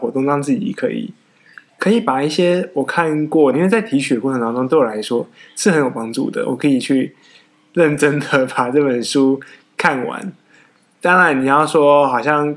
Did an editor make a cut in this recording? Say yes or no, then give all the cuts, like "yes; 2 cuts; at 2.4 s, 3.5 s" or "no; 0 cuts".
yes; 1 cut; at 3.5 s